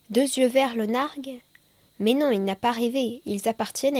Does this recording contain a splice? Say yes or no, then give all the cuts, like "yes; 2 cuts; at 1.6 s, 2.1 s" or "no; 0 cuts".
no; 0 cuts